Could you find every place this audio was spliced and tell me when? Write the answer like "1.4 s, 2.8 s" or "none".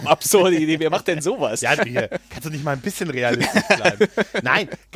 1.8 s